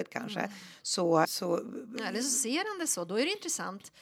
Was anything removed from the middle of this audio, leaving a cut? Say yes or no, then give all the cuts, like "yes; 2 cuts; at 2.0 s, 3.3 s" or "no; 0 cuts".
yes; 1 cut; at 1.2 s